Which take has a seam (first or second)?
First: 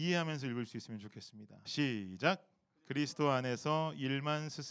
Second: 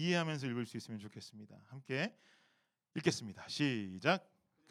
first